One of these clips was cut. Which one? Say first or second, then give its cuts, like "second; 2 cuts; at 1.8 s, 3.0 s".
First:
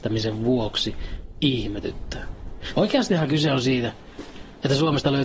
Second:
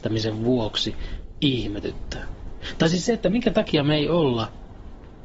first; 1 cut; at 2.7 s